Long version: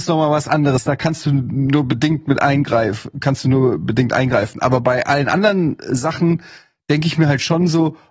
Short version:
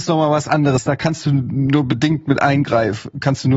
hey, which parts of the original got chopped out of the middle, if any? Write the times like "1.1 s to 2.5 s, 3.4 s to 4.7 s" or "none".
none